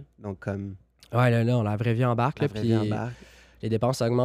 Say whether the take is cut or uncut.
uncut